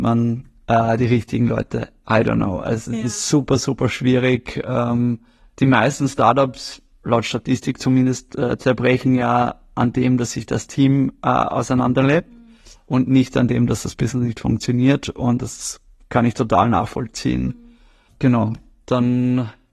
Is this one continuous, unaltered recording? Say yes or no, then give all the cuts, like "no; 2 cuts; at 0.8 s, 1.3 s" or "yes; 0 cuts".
yes; 0 cuts